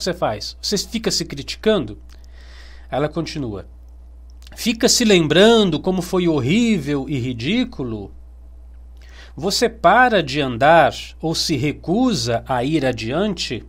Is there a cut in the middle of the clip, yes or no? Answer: no